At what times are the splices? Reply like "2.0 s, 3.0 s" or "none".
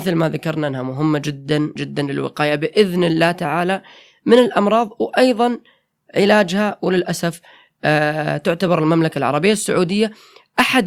1.8 s